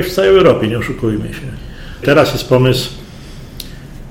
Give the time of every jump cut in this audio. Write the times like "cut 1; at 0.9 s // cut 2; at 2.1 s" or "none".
cut 1; at 2.0 s

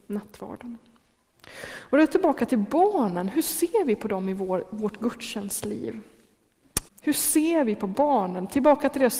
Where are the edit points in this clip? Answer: cut 1; at 6.9 s

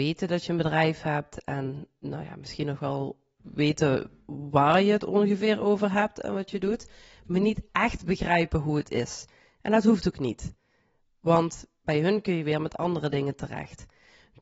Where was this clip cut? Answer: none

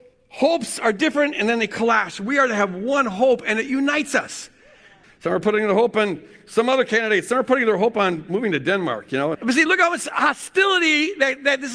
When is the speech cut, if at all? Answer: cut 1; at 5.0 s // cut 2; at 9.3 s

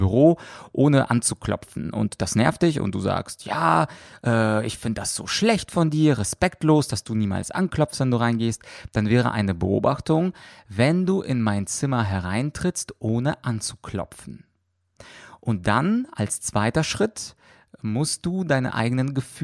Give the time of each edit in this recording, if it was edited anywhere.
none

